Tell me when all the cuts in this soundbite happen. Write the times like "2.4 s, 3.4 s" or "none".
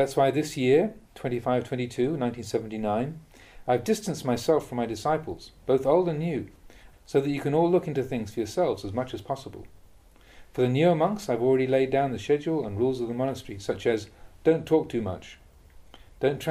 1.1 s, 6.9 s